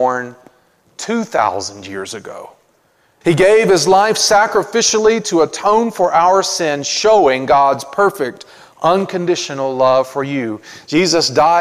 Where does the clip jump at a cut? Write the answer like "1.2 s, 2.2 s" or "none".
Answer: 3.2 s